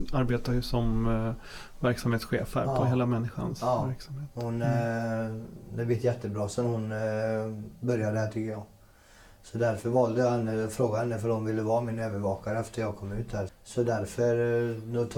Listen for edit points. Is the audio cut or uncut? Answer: cut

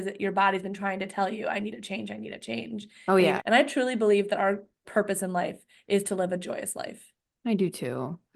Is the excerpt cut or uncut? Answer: cut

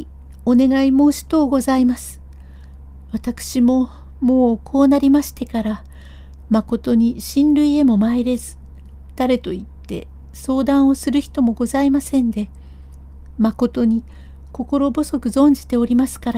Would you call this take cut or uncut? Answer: uncut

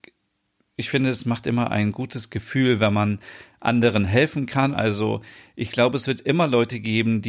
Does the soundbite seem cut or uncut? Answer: cut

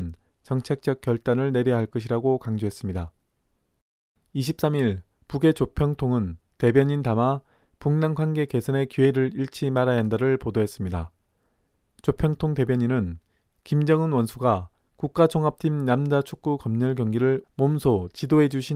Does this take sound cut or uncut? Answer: uncut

